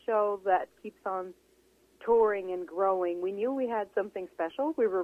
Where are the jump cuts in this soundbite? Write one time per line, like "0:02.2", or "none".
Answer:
none

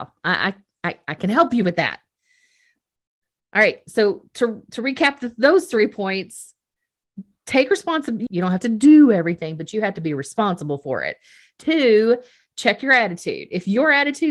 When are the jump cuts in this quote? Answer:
0:08.3

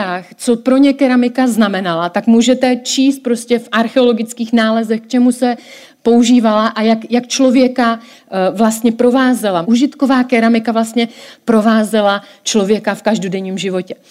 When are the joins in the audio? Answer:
0:09.6

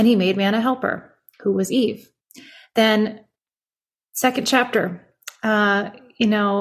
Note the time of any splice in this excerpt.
none

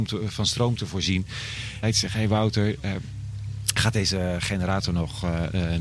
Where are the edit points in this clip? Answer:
0:01.8

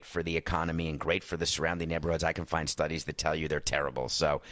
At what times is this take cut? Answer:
none

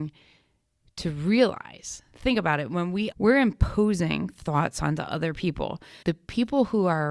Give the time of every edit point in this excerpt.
0:03.1
0:06.0

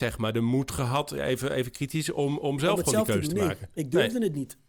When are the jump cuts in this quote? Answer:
none

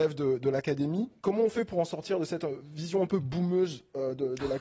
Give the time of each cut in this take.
0:01.2

